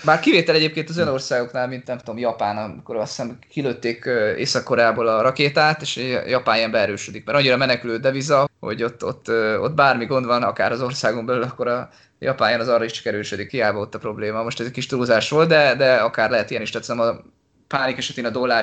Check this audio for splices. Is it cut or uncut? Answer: cut